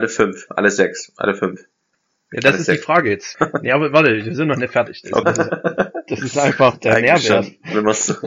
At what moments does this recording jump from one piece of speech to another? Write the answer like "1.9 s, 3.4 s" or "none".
3.3 s, 5.2 s